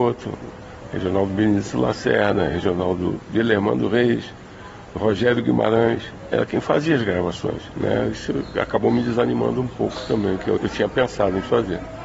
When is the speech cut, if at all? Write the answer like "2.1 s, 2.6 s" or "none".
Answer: 7.7 s, 10.6 s